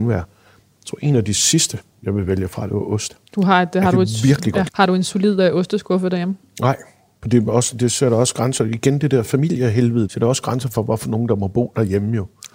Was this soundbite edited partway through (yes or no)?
yes